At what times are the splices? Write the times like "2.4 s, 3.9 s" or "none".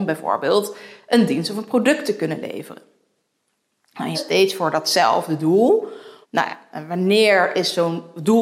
4.1 s, 6.2 s